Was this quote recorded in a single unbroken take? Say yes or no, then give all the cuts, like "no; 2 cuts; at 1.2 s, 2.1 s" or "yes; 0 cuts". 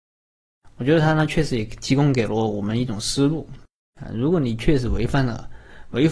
yes; 0 cuts